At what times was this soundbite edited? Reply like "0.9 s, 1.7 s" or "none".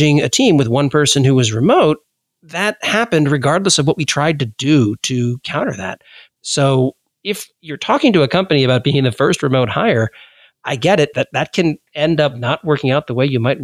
6.4 s, 11.1 s